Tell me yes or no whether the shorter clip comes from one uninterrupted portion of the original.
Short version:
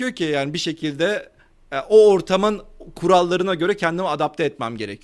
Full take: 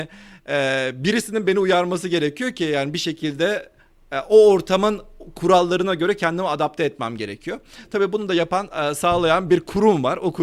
yes